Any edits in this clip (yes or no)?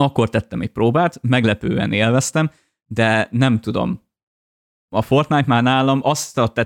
no